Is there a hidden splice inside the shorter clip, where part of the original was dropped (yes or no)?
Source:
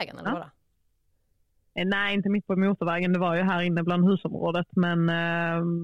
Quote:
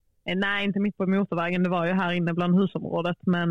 no